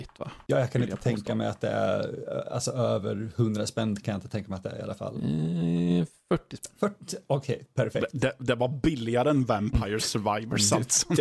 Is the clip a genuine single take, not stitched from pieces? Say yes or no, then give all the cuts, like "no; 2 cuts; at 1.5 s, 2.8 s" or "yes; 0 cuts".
yes; 0 cuts